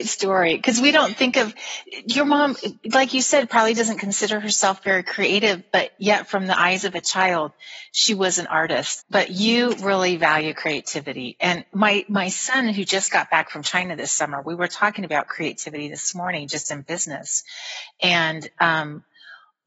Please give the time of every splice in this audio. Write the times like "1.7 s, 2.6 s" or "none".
9.0 s